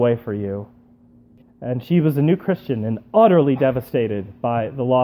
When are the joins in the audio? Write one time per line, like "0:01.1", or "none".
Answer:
0:01.4

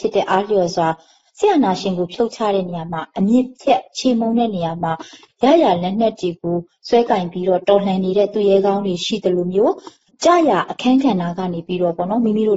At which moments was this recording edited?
none

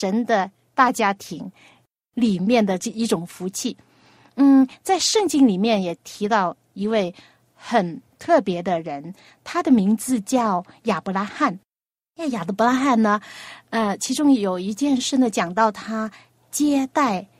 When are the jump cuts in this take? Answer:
none

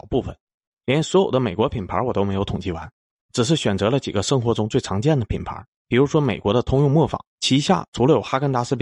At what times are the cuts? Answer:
0:05.7
0:07.3

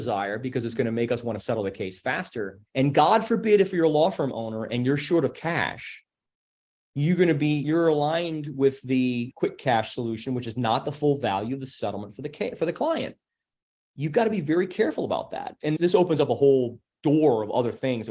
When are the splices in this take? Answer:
0:02.7

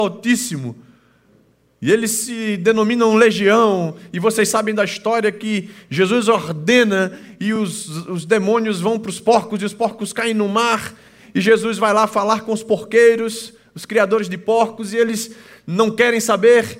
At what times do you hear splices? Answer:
none

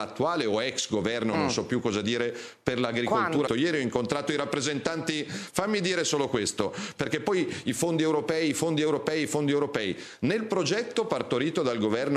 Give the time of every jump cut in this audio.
0:03.5

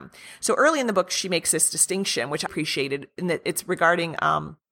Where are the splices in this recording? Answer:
0:02.5

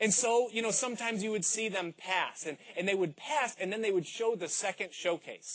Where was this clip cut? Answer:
none

